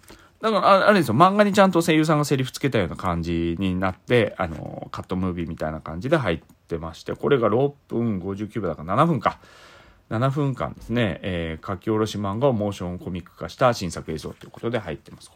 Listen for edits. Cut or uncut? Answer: uncut